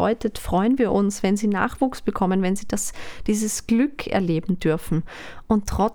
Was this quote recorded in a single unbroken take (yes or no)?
yes